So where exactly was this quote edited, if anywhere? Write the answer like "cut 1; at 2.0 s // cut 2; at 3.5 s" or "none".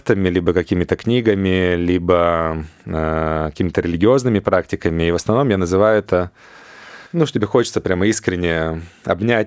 cut 1; at 7.1 s